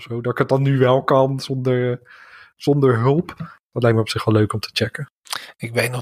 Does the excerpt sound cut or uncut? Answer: uncut